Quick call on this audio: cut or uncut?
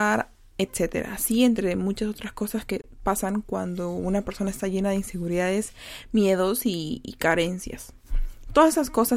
uncut